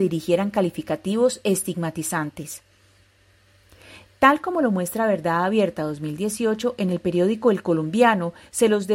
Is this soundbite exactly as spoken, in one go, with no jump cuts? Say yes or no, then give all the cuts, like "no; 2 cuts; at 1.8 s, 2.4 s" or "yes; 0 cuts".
yes; 0 cuts